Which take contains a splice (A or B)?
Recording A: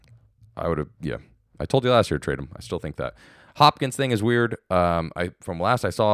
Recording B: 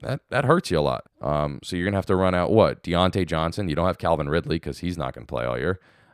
B